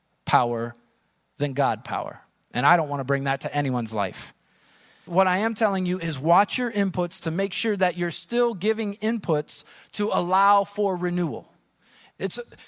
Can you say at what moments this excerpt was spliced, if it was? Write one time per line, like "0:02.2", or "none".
0:05.1